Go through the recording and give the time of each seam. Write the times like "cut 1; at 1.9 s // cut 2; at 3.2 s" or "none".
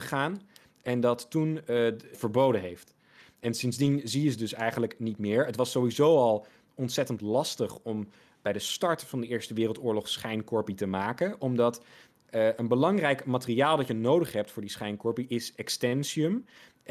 cut 1; at 2.1 s